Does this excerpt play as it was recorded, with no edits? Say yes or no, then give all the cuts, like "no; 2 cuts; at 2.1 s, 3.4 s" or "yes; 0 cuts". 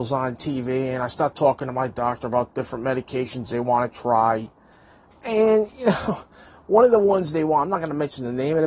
yes; 0 cuts